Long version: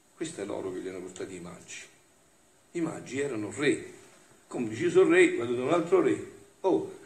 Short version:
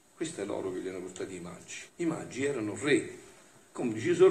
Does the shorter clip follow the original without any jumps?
no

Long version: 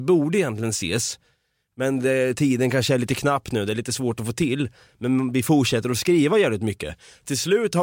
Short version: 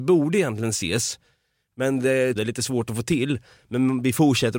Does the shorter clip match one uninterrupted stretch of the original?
no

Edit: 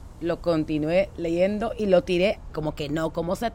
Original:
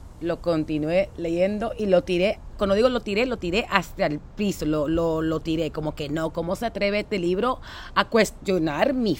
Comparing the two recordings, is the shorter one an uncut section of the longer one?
no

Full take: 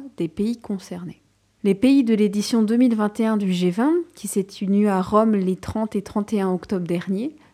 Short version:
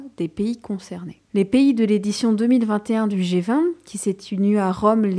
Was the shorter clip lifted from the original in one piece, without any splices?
no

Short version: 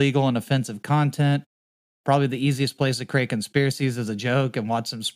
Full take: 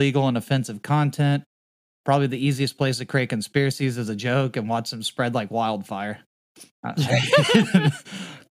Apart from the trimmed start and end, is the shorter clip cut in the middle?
no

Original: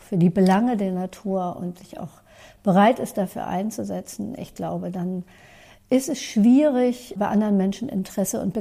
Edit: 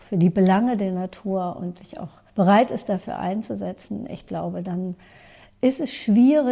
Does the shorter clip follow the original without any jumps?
no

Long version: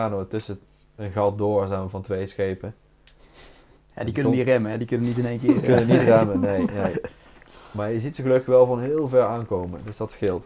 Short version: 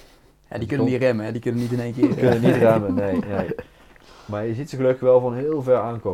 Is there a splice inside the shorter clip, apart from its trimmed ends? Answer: no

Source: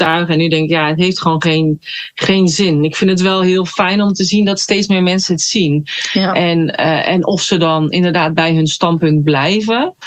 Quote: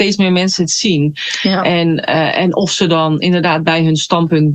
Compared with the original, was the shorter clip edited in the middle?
no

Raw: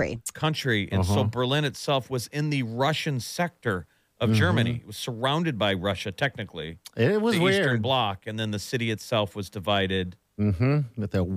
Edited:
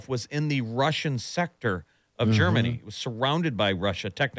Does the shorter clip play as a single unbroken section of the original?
yes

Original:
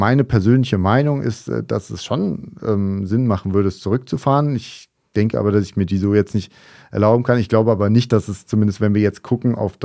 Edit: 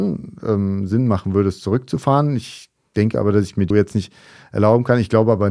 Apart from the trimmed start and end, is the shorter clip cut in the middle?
yes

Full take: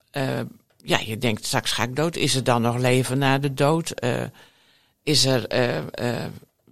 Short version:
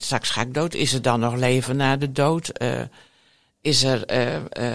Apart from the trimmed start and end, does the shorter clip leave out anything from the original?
no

